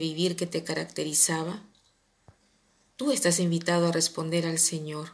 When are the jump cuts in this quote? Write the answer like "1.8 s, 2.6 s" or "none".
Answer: none